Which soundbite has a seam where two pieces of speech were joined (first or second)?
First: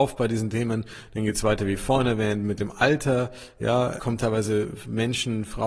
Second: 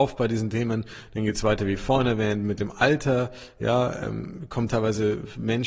first